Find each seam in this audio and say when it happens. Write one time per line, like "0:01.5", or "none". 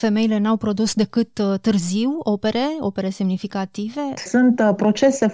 0:04.2